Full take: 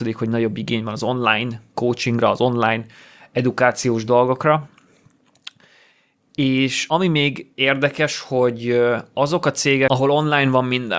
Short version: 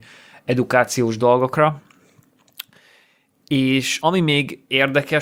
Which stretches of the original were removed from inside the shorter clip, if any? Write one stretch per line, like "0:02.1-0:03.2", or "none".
none